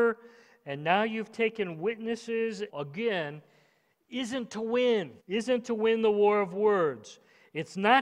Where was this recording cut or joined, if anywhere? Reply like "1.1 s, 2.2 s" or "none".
2.7 s, 5.2 s